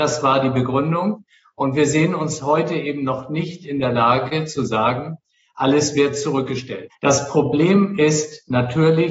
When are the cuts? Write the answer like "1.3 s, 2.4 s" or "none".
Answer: 6.9 s

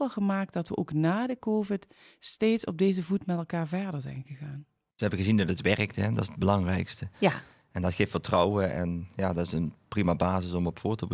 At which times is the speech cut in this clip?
none

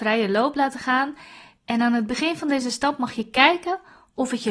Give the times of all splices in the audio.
none

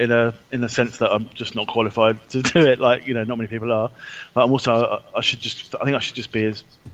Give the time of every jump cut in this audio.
none

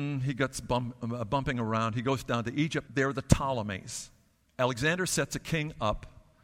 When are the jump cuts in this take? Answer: 2.9 s, 4.4 s

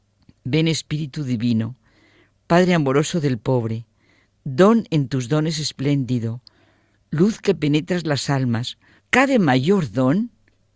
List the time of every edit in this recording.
9.0 s

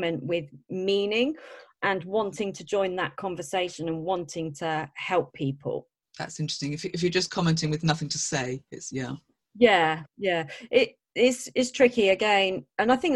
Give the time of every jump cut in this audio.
none

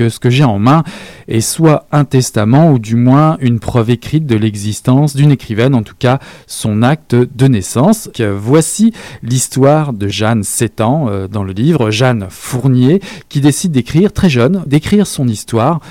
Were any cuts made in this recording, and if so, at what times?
8.1 s, 10.1 s, 14.7 s

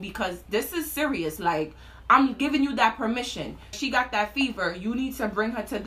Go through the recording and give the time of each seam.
3.7 s

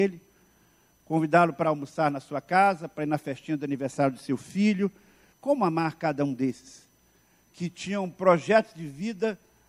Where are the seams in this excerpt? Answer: 5.3 s

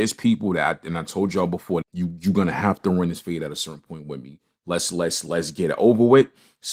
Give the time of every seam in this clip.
1.8 s

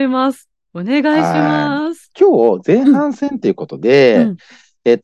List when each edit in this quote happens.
2.1 s

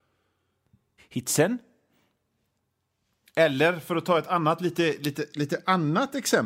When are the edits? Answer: 1.0 s

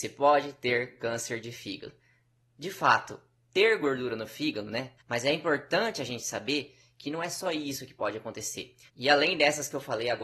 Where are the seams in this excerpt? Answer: 5.0 s, 8.9 s

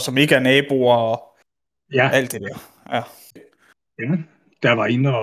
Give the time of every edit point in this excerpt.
3.4 s

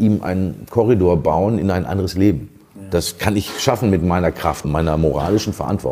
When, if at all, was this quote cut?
4.6 s

